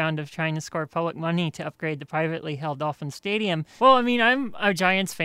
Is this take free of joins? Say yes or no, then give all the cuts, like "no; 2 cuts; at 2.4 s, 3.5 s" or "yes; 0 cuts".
no; 1 cut; at 3.8 s